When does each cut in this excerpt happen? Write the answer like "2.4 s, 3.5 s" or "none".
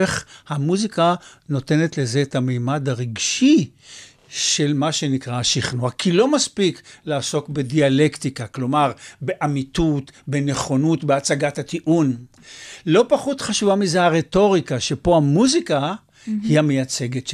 none